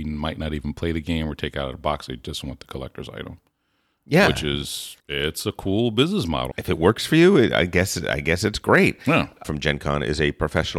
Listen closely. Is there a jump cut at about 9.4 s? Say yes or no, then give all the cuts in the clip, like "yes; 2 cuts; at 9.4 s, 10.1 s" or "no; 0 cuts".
yes; 3 cuts; at 5.0 s, 6.5 s, 9.4 s